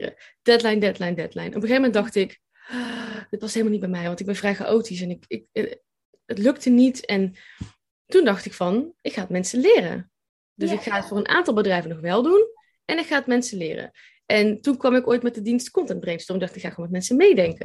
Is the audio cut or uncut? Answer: uncut